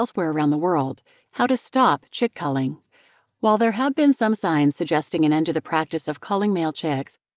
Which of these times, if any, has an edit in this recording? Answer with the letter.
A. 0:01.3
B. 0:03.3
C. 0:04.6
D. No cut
A